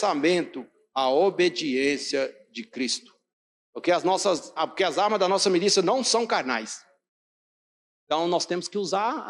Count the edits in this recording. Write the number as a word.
two